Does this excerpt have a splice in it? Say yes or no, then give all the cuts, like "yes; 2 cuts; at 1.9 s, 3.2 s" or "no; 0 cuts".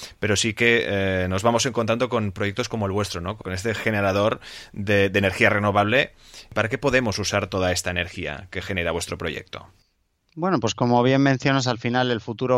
no; 0 cuts